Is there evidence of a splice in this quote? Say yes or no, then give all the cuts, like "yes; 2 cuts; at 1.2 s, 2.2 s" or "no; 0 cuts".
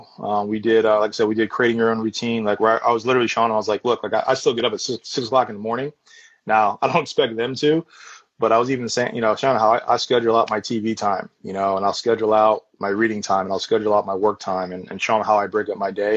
no; 0 cuts